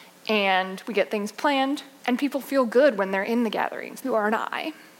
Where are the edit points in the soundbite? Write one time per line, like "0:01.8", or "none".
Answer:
0:02.0
0:04.0